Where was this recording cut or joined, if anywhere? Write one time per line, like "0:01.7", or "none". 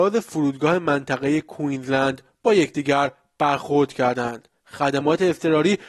none